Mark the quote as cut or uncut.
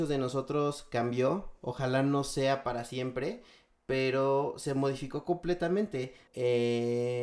cut